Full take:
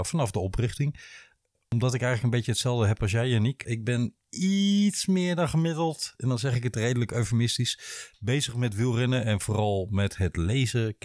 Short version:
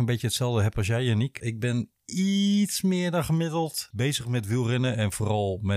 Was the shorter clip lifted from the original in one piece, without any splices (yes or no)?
no